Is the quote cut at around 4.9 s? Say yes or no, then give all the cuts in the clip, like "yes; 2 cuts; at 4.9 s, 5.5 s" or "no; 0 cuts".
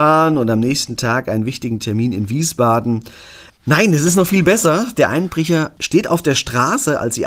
no; 1 cut; at 3.5 s